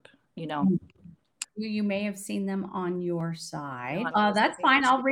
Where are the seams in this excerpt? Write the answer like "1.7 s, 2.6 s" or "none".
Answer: 1.5 s, 4.1 s